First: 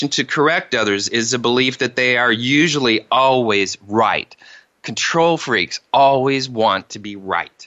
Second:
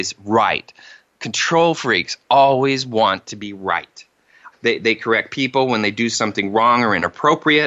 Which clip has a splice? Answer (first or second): second